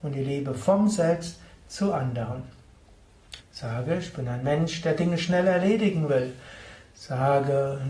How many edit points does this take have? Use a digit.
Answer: 1